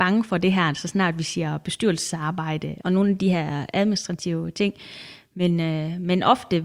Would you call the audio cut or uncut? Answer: cut